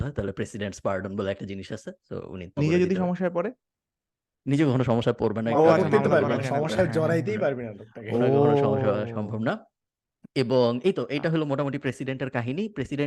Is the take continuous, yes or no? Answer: no